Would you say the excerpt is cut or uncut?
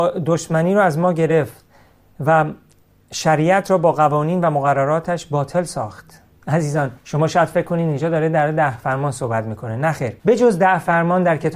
cut